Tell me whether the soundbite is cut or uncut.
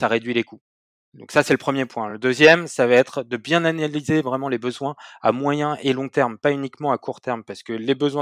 uncut